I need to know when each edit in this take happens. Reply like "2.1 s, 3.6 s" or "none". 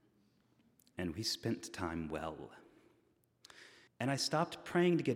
3.9 s